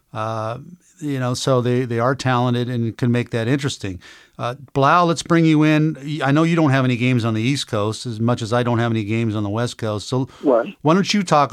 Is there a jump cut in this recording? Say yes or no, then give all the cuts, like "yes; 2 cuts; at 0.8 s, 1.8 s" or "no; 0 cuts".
no; 0 cuts